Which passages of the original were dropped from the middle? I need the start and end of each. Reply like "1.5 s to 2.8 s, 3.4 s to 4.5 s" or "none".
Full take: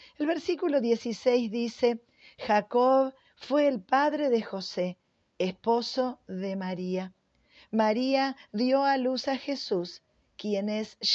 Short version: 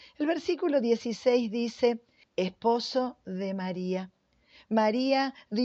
2.2 s to 5.3 s